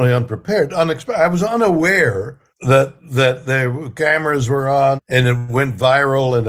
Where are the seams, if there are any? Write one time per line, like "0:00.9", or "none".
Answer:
0:02.5
0:05.0